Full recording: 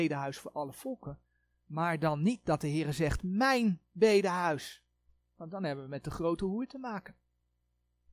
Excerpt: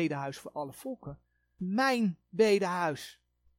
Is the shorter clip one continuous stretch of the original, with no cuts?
no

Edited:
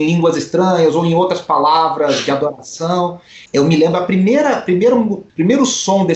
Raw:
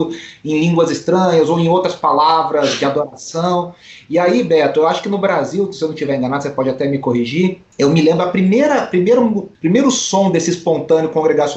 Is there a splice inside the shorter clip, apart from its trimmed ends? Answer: yes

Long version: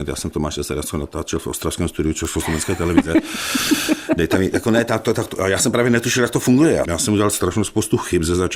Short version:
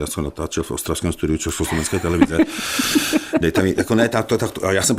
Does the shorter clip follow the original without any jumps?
yes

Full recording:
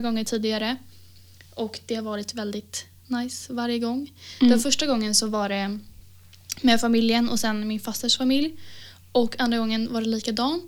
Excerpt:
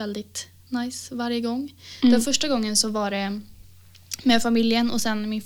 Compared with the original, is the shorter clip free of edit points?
yes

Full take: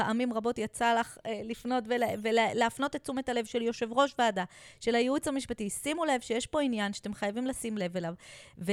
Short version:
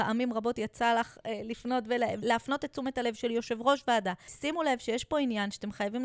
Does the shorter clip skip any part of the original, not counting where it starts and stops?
yes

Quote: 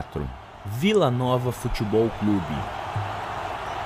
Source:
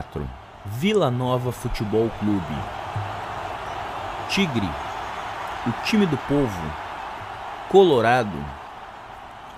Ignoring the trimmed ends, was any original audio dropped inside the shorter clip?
no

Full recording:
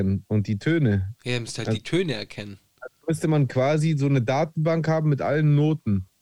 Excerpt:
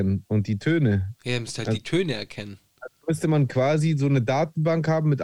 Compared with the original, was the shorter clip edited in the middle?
no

